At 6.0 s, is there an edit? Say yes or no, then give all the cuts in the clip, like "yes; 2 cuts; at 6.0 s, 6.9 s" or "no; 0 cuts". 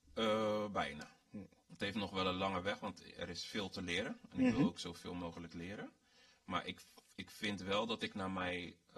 no; 1 cut; at 1.2 s